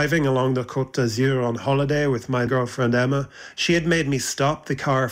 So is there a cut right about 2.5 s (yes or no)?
yes